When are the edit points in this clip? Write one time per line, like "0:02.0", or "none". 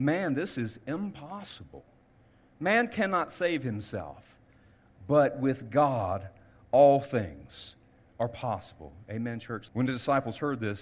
0:09.7